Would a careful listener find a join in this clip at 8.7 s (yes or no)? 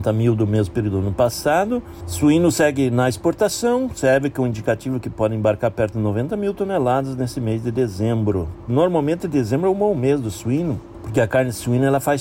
yes